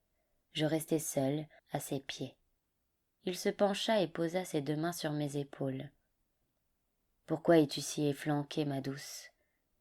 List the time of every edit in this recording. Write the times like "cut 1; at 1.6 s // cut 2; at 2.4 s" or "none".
cut 1; at 1.6 s